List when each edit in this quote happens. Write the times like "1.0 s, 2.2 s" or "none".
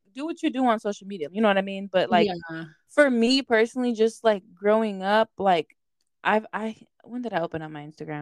1.3 s